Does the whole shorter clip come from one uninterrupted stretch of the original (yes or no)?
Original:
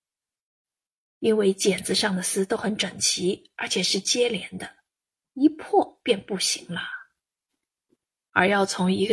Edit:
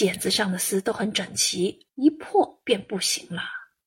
no